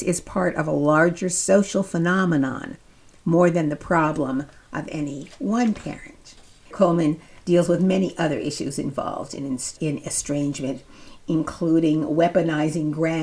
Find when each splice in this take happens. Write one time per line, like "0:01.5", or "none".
0:06.7
0:09.8